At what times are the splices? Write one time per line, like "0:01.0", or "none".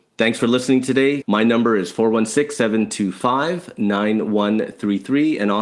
0:01.2